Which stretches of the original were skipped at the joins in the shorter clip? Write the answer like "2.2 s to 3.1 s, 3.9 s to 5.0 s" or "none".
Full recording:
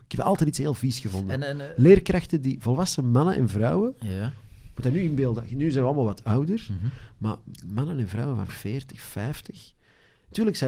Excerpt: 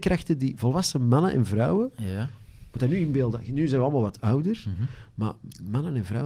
none